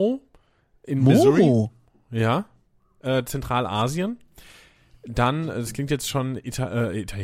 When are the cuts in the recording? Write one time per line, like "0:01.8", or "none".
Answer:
0:03.2